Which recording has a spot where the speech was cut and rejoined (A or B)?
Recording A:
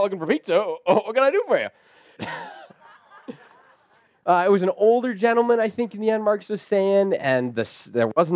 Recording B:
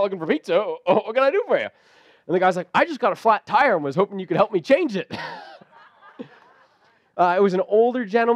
A